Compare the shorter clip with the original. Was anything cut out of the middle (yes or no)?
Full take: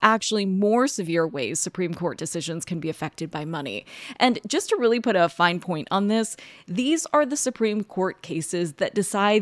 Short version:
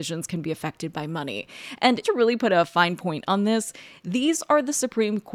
yes